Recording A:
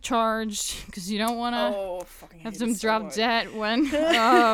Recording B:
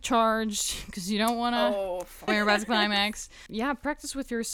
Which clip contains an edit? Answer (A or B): B